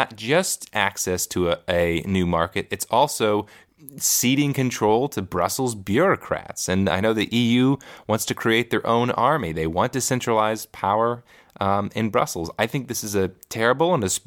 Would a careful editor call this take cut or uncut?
uncut